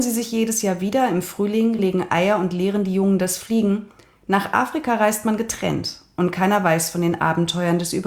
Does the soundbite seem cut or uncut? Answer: cut